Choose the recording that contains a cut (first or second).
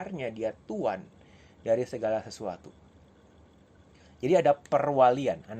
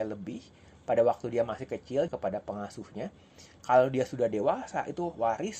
second